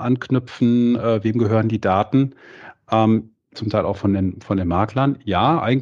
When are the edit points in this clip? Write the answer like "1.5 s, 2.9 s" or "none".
3.5 s

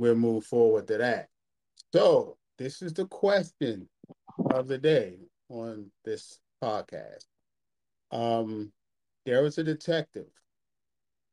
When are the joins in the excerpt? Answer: none

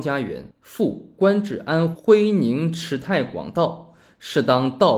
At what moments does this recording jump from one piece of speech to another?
1.9 s

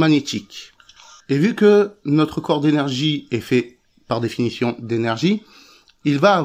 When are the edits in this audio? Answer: none

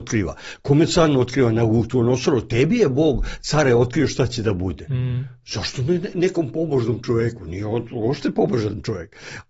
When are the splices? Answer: none

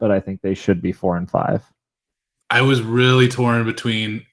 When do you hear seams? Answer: 2.4 s

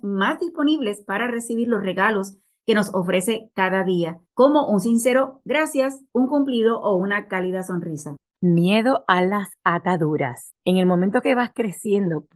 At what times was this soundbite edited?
8.3 s, 10.5 s

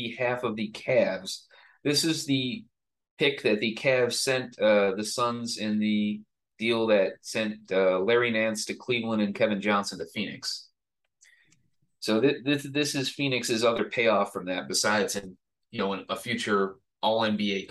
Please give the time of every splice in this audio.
none

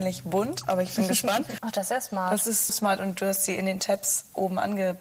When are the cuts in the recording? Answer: 1.6 s, 2.7 s

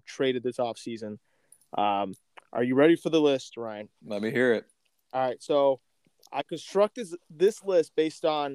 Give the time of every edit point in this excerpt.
none

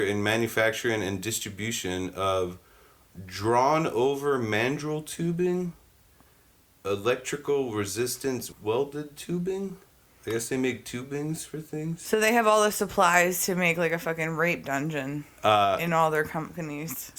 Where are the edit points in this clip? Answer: 8.5 s

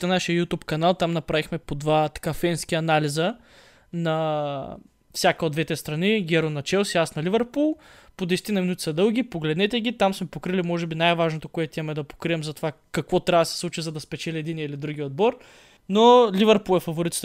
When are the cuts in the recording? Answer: 15.8 s

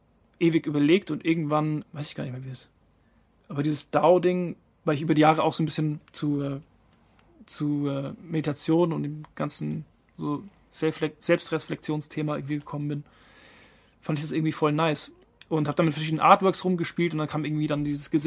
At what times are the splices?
1.8 s

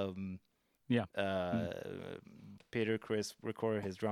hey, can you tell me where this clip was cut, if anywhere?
2.6 s

